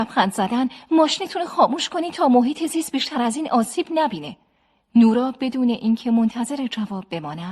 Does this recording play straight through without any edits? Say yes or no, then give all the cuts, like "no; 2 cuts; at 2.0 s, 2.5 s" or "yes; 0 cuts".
yes; 0 cuts